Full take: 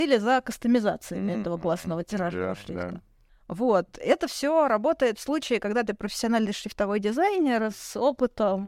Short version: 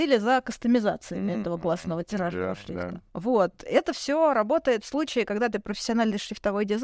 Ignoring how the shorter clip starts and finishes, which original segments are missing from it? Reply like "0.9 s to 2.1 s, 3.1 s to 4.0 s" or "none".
3.1 s to 3.4 s